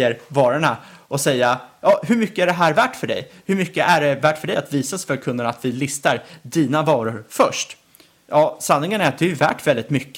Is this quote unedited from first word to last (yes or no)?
yes